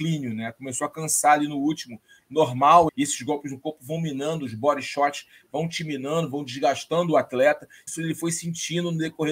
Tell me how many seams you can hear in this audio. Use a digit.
2